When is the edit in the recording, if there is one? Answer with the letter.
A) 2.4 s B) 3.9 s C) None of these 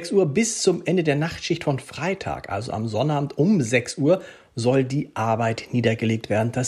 C